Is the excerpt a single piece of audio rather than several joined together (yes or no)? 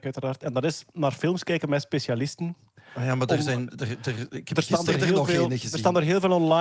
yes